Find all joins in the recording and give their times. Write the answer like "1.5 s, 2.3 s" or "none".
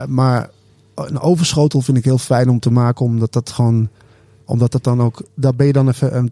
5.3 s

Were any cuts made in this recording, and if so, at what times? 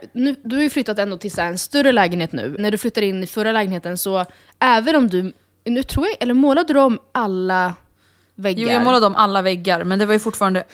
2.6 s

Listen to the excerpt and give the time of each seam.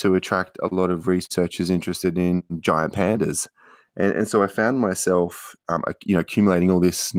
none

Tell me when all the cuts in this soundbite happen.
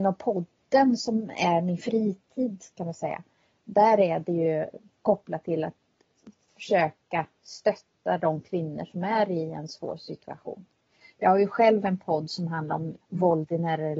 11.0 s, 13.0 s

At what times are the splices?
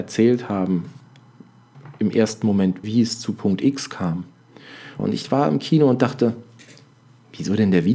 2.8 s, 5.0 s

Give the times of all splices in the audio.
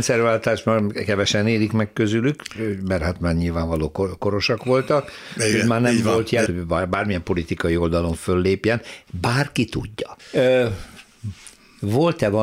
6.5 s, 10.2 s

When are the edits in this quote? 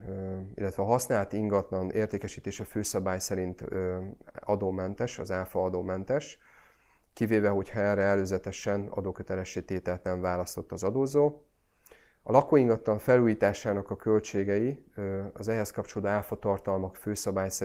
none

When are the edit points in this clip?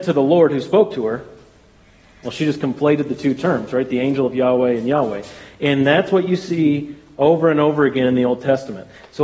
none

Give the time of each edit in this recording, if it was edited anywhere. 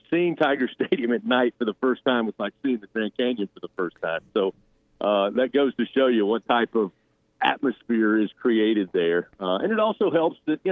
none

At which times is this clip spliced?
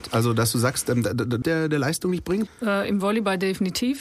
1.4 s, 2.5 s

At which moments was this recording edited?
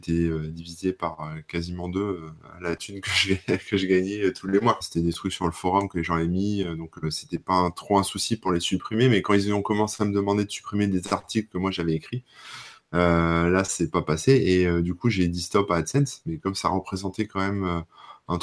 4.8 s

